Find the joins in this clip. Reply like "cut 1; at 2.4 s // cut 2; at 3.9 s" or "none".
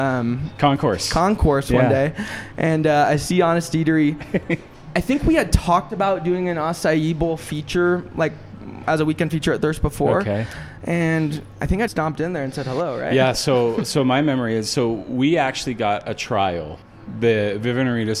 cut 1; at 11.9 s